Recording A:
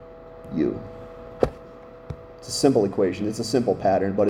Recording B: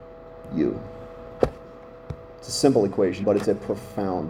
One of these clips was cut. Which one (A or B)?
B